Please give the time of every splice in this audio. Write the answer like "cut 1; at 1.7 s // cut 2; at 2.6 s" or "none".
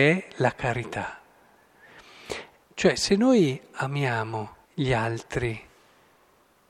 cut 1; at 2.6 s // cut 2; at 4.6 s